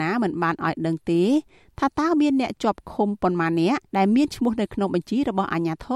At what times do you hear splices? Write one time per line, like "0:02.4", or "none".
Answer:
0:03.9